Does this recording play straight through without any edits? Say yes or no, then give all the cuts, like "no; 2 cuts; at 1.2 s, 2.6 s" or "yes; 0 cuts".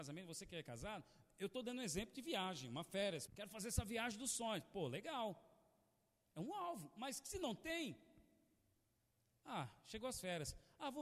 no; 1 cut; at 3.3 s